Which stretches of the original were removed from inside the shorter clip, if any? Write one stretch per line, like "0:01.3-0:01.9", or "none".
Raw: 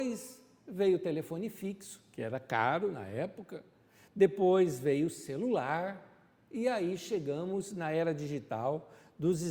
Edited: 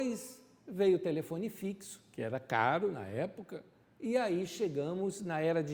0:03.8-0:06.3